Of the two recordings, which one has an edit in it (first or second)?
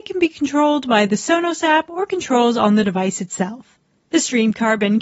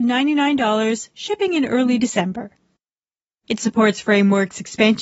second